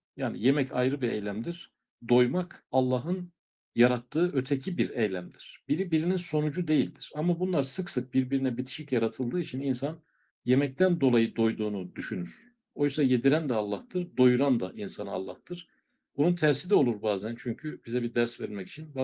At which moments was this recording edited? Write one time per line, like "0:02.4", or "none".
none

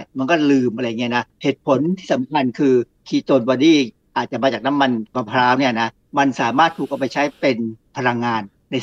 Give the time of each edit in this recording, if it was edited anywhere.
0:01.3

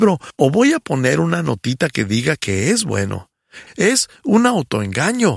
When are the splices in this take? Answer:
0:03.7

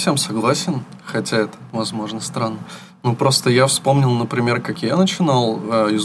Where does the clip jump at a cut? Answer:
none

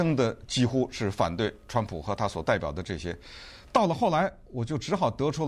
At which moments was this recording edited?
none

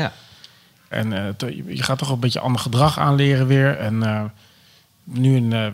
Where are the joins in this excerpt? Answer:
0:00.9

